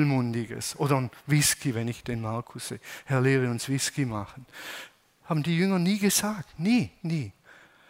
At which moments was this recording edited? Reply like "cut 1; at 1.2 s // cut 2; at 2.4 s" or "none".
cut 1; at 7.0 s